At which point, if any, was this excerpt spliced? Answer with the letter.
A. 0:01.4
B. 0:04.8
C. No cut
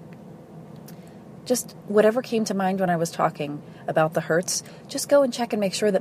A